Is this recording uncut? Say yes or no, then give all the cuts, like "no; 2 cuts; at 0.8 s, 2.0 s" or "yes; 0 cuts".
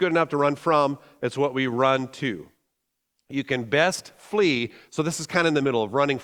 yes; 0 cuts